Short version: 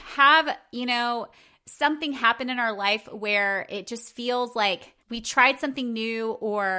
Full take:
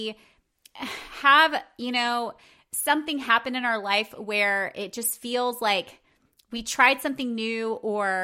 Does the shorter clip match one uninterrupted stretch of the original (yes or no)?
no